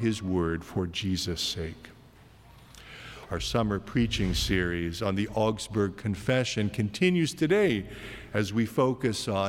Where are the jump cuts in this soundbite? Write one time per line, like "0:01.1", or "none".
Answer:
0:03.3